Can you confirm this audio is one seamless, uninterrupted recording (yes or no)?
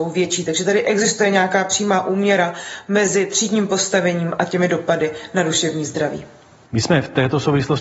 no